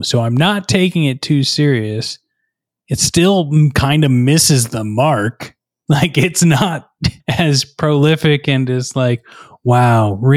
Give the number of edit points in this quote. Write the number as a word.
one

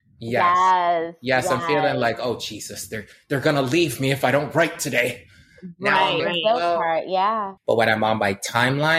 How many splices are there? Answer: two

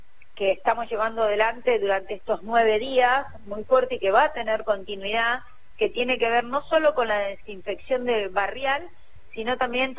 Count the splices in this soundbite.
zero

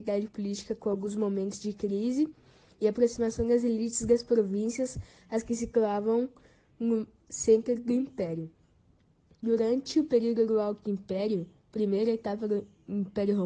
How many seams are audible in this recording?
zero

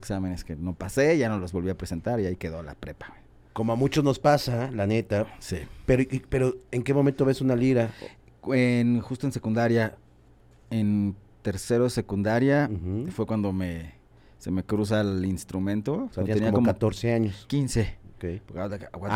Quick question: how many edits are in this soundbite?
zero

